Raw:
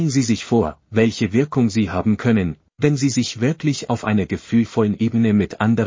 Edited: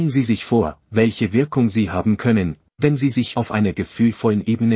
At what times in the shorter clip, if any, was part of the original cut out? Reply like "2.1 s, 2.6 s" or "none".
3.3 s